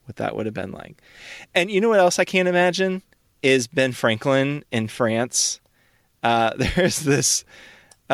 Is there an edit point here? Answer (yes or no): no